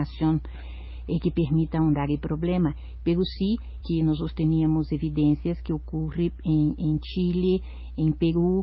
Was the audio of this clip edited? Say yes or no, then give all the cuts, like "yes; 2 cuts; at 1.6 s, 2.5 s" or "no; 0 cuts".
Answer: yes; 1 cut; at 3.8 s